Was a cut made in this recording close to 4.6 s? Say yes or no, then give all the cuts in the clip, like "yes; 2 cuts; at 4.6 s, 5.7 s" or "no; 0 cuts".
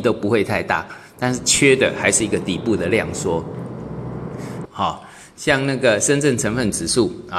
yes; 1 cut; at 4.6 s